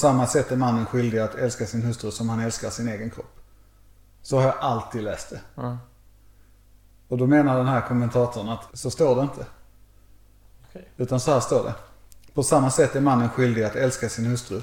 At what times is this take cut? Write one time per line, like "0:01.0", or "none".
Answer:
0:08.7